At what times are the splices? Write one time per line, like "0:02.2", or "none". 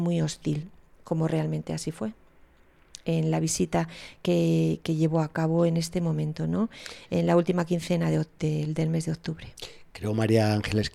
none